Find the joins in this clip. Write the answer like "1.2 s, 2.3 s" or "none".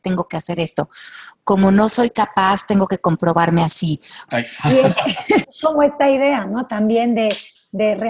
4.3 s, 5.4 s